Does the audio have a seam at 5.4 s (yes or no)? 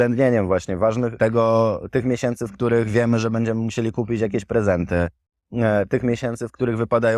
no